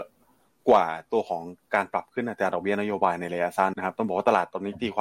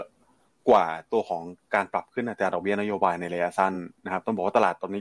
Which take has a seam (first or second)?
first